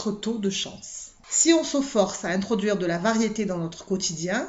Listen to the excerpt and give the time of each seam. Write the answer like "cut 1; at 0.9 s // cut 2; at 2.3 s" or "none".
cut 1; at 1.2 s